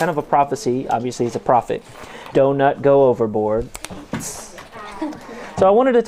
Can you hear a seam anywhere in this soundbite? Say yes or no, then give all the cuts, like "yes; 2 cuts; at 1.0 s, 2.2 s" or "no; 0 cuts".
yes; 1 cut; at 2.3 s